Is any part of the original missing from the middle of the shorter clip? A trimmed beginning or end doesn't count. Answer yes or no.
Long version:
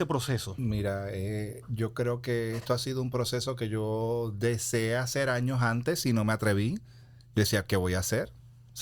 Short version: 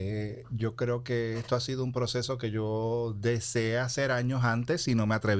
no